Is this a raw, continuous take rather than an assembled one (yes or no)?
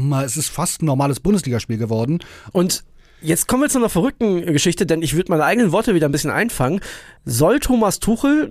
no